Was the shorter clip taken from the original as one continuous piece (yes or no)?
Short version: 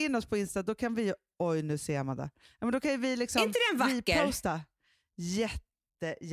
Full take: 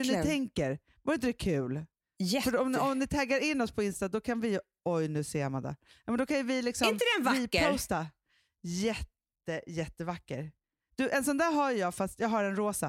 yes